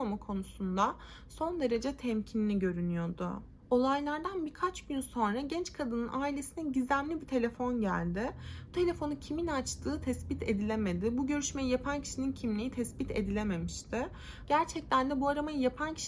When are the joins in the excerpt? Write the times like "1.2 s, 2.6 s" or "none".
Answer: 14.4 s